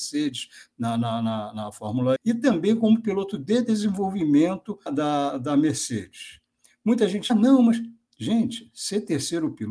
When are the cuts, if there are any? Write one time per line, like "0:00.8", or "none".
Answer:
0:02.2
0:04.9
0:07.3